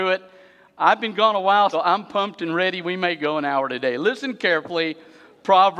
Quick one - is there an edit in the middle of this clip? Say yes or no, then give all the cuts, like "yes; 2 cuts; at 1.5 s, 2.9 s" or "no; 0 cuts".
yes; 1 cut; at 1.7 s